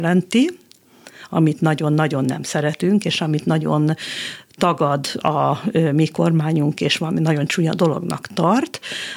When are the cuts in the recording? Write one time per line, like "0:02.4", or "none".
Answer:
none